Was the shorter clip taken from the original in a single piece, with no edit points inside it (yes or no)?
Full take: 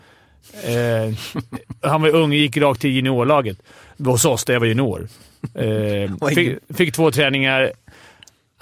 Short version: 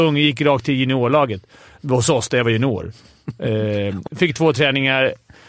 no